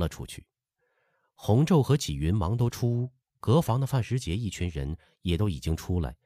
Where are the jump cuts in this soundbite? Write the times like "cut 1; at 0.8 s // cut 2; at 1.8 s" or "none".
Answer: none